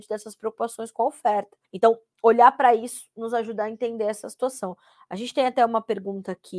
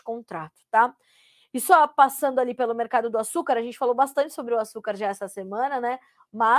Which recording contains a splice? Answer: first; 1 cut; at 1.6 s

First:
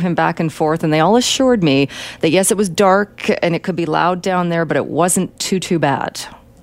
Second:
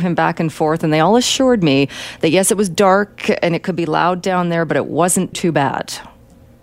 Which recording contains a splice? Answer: second; 1 cut; at 5.3 s

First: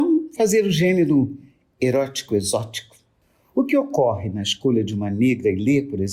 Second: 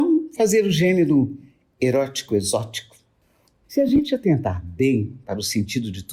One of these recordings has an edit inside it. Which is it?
second; 1 cut; at 3.5 s

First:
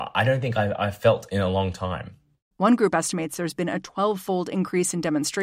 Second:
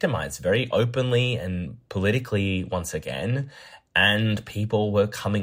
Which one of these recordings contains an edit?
first; 1 cut; at 2.5 s

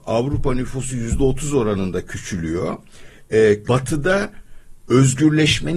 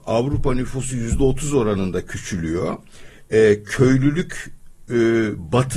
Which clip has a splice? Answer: first; 1 cut; at 3.6 s

